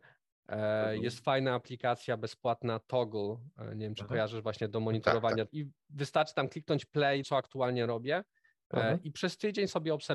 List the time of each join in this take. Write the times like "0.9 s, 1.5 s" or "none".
5.5 s, 7.2 s